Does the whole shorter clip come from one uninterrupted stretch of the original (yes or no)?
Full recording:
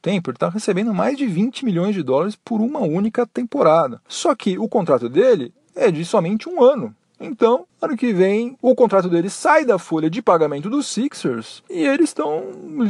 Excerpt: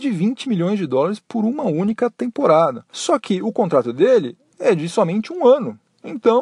yes